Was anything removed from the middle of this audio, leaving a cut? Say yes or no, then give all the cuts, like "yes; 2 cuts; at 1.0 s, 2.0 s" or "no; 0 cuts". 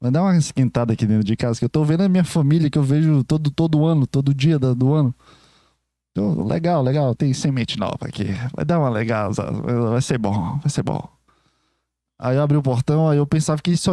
yes; 1 cut; at 7.2 s